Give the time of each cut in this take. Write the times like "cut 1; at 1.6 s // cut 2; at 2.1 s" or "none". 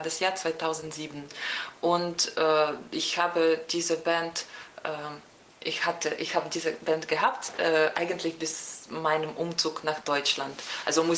none